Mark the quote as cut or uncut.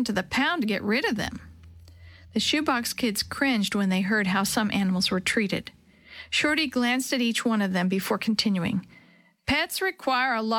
uncut